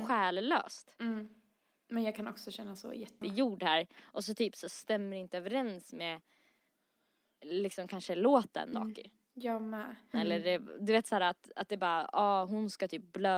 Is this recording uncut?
no; 3 cuts; at 3.2 s, 8.7 s, 10.1 s

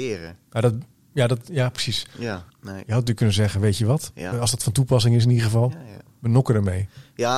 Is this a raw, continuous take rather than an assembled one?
no; 2 cuts; at 2.5 s, 4.3 s

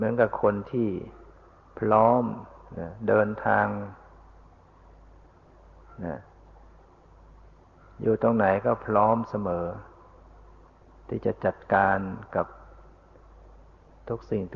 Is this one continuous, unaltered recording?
yes; 0 cuts

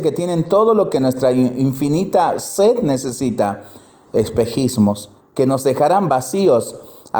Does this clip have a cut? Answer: yes; 2 cuts; at 4.1 s, 5.2 s

